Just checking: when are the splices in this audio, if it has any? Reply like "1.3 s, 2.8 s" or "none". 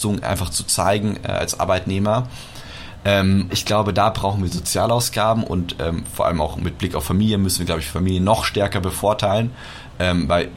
3.5 s